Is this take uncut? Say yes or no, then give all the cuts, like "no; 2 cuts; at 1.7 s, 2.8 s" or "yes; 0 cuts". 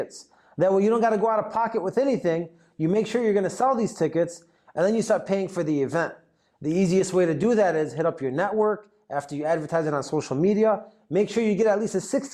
yes; 0 cuts